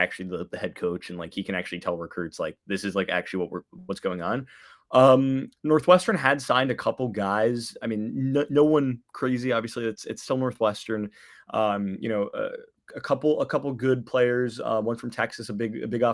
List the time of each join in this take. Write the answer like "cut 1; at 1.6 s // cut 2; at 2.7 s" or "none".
none